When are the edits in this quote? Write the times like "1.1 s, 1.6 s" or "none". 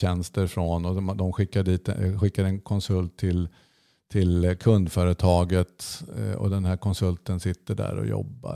none